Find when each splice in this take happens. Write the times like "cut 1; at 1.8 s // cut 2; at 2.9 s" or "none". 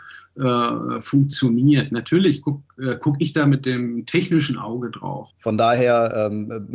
cut 1; at 5.3 s